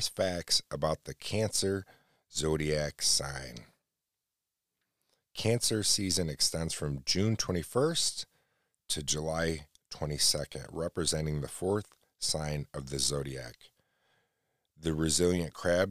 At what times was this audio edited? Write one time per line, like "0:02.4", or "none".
none